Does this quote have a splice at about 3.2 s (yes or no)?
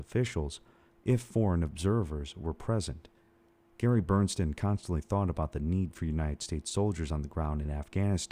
no